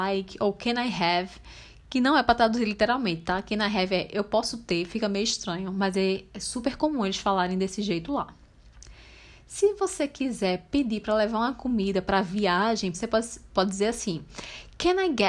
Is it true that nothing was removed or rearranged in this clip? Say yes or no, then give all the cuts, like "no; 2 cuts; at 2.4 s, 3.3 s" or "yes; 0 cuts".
no; 1 cut; at 12.9 s